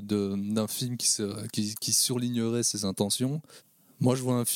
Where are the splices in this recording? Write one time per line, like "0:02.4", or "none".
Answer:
none